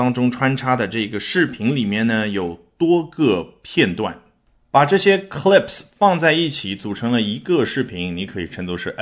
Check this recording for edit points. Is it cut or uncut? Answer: uncut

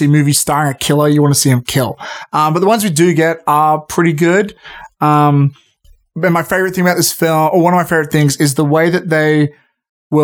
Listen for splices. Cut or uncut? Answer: uncut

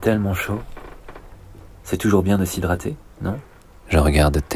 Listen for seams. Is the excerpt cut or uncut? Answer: uncut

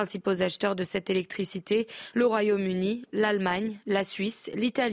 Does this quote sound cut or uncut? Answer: uncut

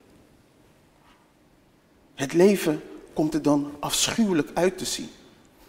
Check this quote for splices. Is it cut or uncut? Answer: uncut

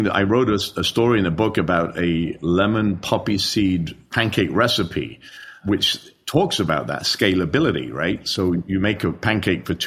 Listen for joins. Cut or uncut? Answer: uncut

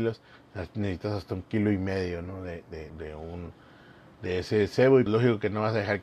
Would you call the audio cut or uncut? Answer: cut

